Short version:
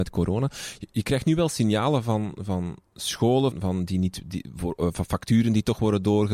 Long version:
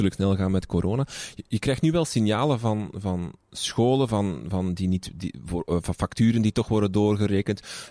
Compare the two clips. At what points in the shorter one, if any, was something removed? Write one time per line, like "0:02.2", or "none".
0:03.5